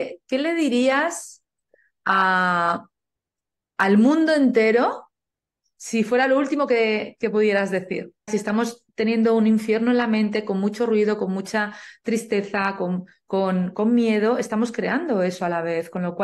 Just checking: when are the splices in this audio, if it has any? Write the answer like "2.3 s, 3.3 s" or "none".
8.3 s

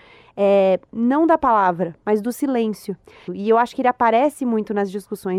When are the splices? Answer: 3.3 s

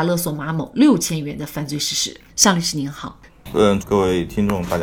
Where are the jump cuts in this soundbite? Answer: 2.3 s, 3.8 s

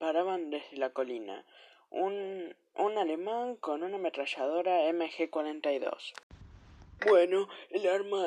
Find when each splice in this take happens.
7.0 s

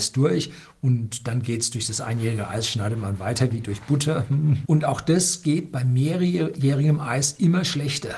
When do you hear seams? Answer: 4.6 s

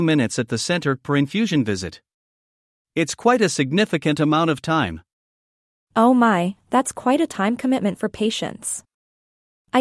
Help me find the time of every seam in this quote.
none

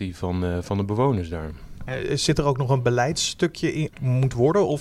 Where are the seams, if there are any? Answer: 3.9 s

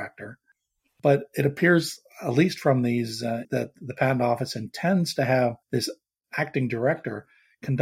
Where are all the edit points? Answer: 3.4 s, 5.6 s

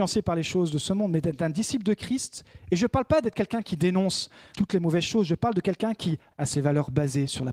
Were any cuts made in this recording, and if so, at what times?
4.5 s, 6.3 s

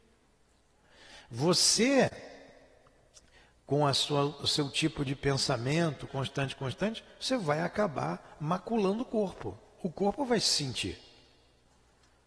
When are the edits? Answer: 6.1 s

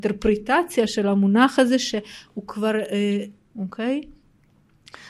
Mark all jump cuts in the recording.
3.4 s

